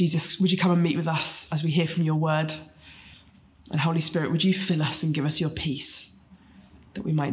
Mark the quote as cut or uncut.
uncut